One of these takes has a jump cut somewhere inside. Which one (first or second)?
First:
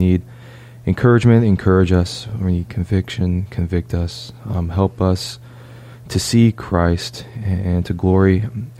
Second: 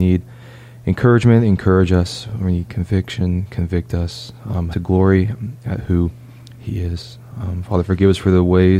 second